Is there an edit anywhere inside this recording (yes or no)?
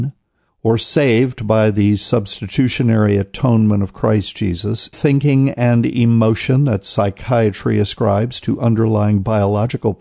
yes